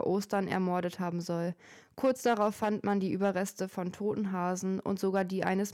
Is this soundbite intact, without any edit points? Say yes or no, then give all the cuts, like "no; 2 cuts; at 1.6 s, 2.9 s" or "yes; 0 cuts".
yes; 0 cuts